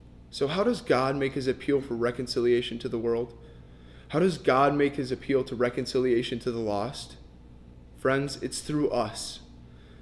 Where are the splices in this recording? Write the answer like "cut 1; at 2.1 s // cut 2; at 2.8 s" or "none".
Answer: none